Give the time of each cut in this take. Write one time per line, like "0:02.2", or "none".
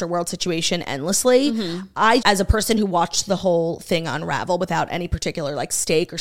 0:02.2